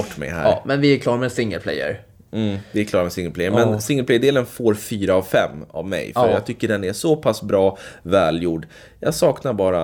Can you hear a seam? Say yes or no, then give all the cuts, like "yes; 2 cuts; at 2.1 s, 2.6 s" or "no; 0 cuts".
no; 0 cuts